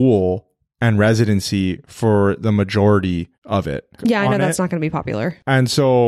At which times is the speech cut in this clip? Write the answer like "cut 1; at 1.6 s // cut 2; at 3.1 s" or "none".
cut 1; at 4.0 s